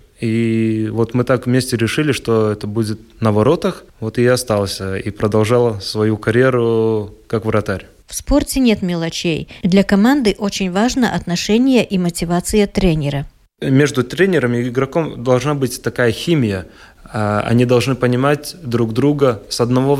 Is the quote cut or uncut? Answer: cut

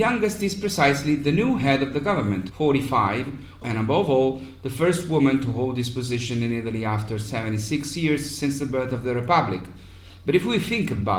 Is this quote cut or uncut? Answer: cut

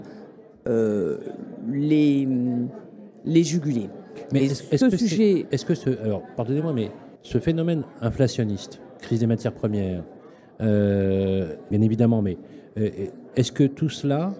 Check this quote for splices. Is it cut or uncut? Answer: cut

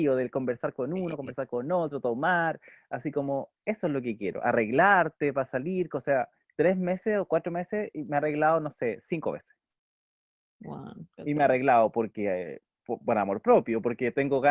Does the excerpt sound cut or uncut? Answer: uncut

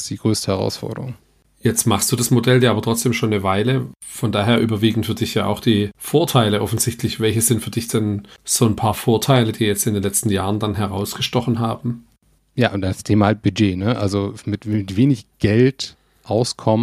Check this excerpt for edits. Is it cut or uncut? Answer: cut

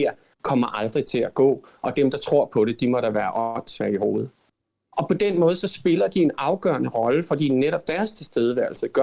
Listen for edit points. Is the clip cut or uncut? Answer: uncut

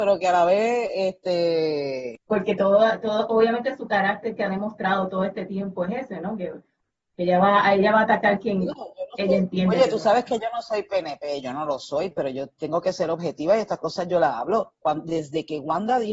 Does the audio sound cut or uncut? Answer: uncut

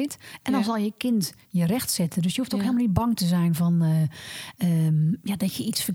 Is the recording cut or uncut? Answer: uncut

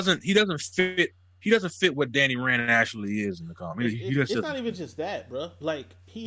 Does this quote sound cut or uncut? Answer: uncut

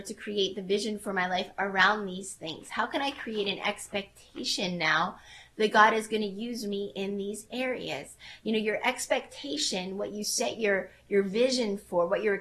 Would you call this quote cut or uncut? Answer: uncut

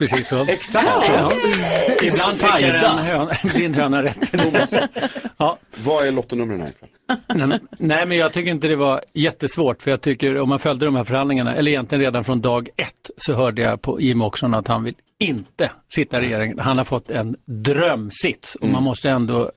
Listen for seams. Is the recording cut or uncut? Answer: uncut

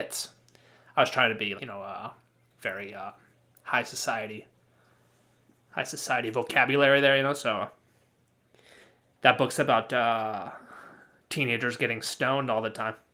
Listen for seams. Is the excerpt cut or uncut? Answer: cut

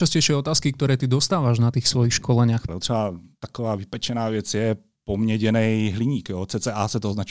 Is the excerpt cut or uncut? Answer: cut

